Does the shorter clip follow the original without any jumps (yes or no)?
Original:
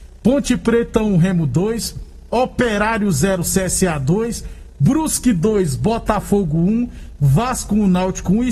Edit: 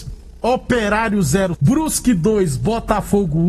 no